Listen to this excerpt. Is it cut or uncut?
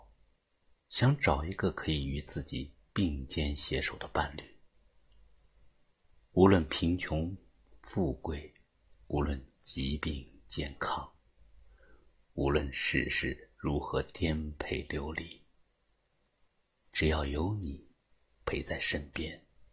cut